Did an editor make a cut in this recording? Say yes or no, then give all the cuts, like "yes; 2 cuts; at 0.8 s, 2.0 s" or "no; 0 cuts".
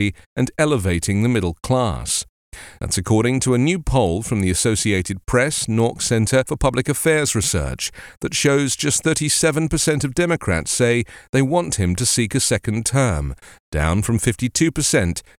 yes; 1 cut; at 2.8 s